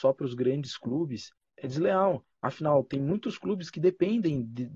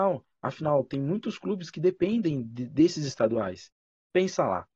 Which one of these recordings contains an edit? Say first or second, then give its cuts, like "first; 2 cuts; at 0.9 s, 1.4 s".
first; 1 cut; at 1.5 s